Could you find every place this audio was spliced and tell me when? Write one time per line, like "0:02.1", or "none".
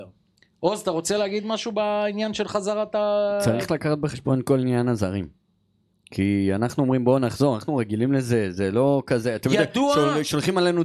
none